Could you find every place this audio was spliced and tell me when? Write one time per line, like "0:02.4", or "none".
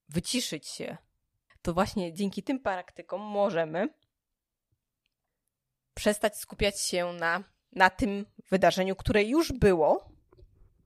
0:01.5